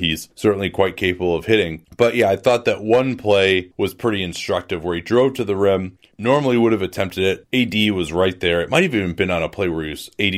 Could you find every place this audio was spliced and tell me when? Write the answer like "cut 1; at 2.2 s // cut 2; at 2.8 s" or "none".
cut 1; at 7.5 s

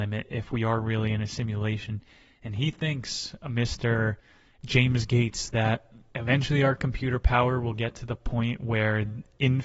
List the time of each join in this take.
none

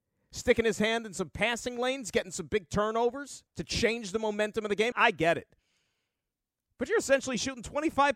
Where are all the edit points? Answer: cut 1; at 3.5 s // cut 2; at 4.9 s

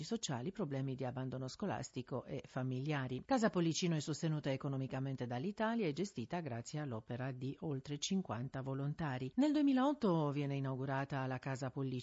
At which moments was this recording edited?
cut 1; at 3.2 s // cut 2; at 9.3 s

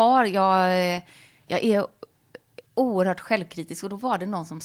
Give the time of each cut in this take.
cut 1; at 1.5 s // cut 2; at 2.7 s

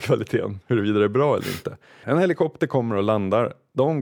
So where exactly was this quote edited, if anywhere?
cut 1; at 2.0 s

